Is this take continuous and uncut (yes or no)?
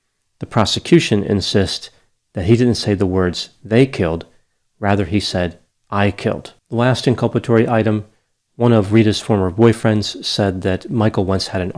no